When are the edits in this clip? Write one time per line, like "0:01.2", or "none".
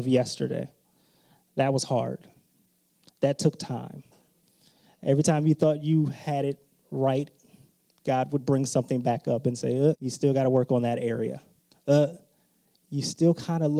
0:09.9